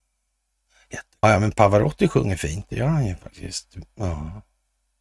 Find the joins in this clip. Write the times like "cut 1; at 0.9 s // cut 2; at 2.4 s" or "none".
cut 1; at 1.2 s